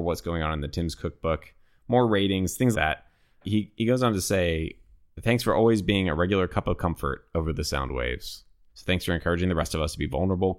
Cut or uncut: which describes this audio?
cut